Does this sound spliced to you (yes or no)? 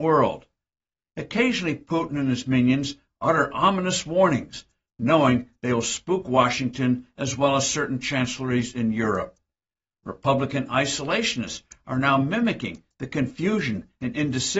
yes